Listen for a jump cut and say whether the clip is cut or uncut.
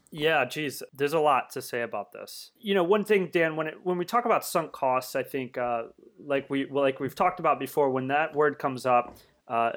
uncut